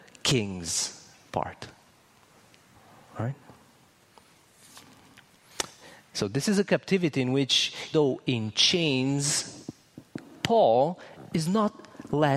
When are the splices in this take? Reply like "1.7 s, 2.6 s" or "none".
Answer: 7.9 s